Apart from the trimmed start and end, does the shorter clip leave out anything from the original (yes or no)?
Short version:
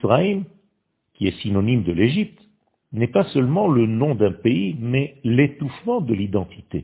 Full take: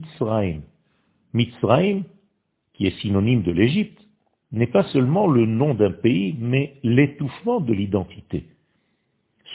no